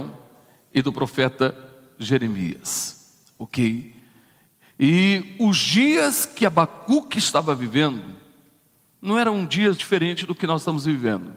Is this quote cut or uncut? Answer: cut